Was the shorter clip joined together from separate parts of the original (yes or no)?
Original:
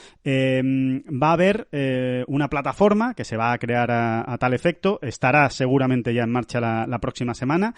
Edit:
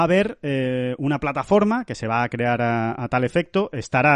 no